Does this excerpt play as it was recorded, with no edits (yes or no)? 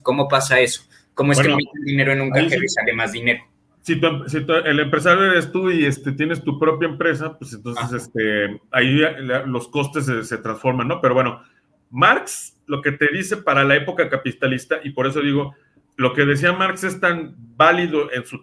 yes